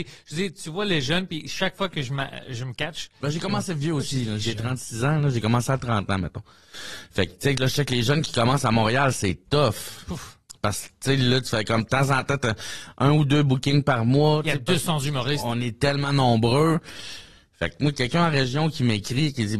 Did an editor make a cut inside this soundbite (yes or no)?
no